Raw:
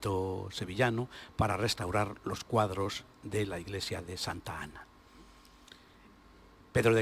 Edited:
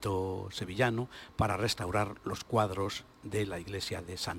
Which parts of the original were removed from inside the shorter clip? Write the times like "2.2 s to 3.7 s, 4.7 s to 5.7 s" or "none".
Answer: none